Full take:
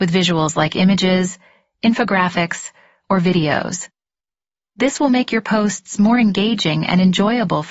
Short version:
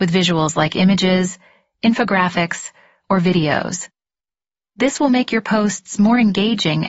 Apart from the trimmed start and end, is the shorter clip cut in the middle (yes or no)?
no